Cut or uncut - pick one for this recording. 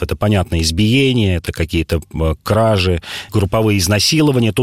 cut